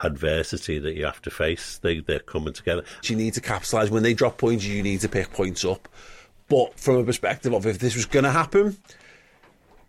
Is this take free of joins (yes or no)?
no